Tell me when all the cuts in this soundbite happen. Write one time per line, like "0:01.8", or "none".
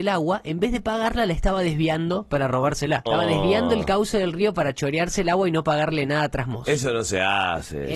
0:03.1